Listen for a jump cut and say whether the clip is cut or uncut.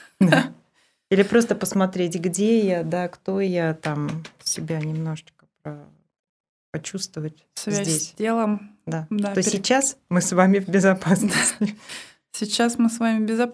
uncut